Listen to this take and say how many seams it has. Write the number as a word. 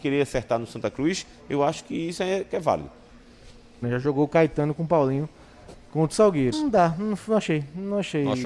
two